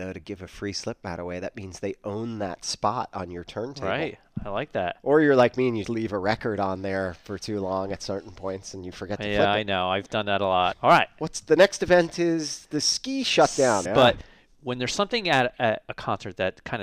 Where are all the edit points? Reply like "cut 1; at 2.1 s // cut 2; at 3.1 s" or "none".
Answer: cut 1; at 5.8 s // cut 2; at 10.7 s // cut 3; at 13.8 s